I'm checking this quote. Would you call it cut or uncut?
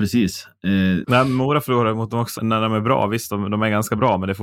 cut